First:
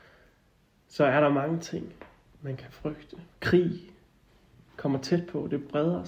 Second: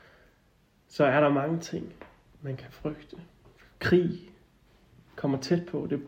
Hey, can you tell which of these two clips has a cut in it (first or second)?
first